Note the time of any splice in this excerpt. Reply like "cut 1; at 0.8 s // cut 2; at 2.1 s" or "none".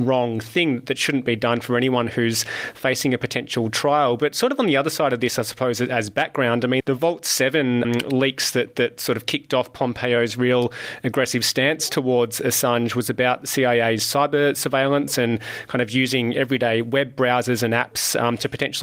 cut 1; at 6.8 s // cut 2; at 7.8 s